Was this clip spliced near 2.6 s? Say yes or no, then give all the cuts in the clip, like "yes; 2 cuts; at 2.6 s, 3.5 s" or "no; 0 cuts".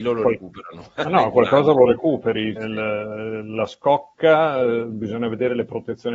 yes; 1 cut; at 2.6 s